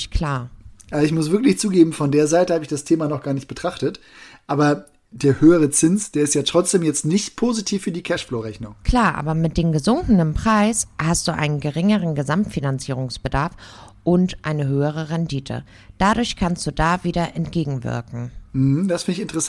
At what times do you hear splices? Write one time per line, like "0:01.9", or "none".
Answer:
none